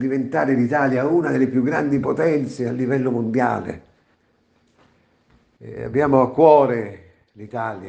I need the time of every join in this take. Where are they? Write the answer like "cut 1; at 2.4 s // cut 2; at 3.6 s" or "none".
cut 1; at 5.6 s